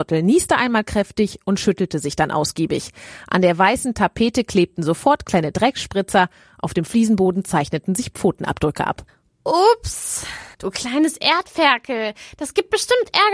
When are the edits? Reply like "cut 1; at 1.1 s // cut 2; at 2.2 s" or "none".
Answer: cut 1; at 10.5 s